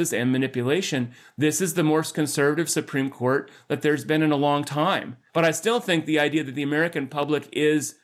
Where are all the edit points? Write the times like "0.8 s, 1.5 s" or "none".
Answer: 5.3 s